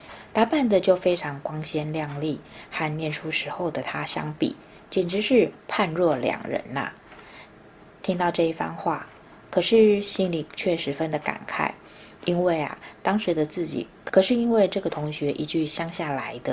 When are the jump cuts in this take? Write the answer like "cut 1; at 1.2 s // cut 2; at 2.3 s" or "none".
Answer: cut 1; at 9.4 s